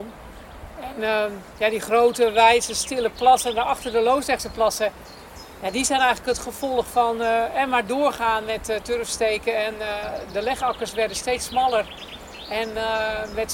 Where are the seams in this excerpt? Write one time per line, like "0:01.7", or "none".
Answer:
none